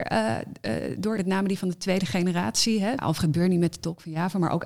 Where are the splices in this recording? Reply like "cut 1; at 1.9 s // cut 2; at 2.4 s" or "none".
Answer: cut 1; at 1.2 s // cut 2; at 3.0 s